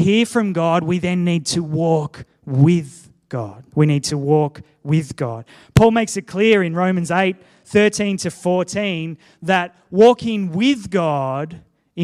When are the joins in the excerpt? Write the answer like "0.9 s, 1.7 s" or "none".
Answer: 3.7 s